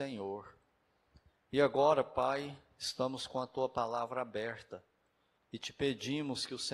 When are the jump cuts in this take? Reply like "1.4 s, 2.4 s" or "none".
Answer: 5.4 s